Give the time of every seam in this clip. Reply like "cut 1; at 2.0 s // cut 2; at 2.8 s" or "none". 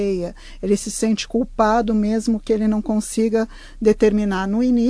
none